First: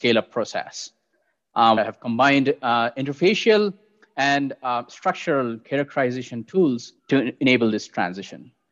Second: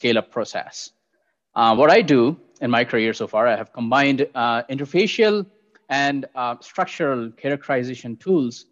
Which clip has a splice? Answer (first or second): first